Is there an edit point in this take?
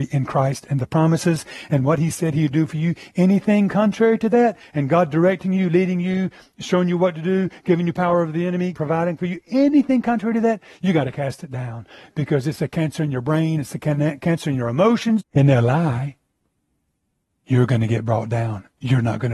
yes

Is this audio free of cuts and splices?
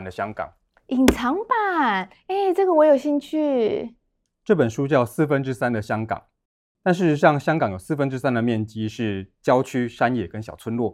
no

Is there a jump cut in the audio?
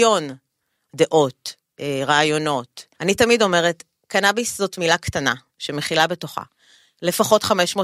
yes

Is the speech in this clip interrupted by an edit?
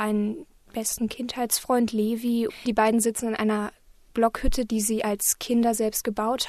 yes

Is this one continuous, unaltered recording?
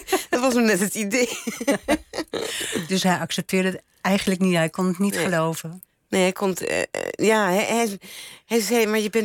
yes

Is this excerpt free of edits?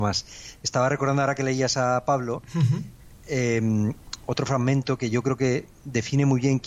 yes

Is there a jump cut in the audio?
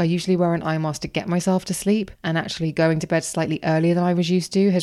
yes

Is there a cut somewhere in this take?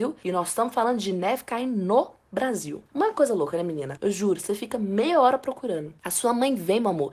yes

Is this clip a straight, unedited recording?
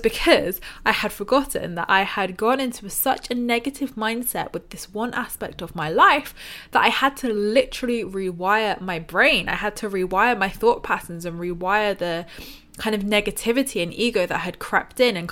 yes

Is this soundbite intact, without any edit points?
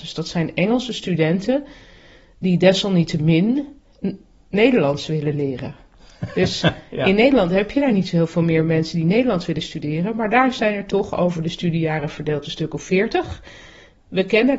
yes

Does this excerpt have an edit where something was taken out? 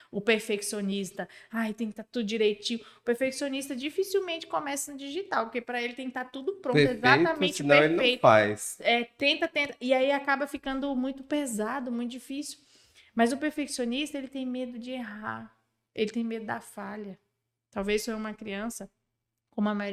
no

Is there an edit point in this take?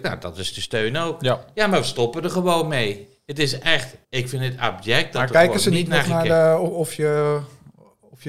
yes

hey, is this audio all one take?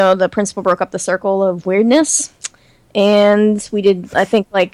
yes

